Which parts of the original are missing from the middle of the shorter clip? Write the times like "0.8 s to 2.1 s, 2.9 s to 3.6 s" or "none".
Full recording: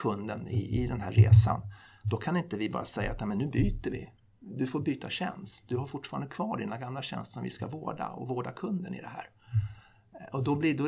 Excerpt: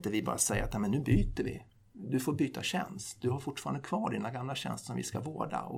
none